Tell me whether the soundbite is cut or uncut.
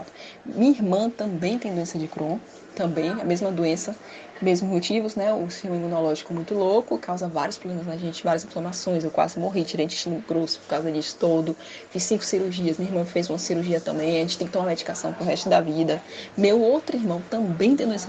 uncut